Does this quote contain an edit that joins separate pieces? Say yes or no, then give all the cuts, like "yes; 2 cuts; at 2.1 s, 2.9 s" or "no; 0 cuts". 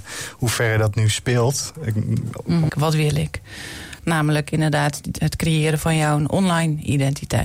yes; 2 cuts; at 2.7 s, 4.0 s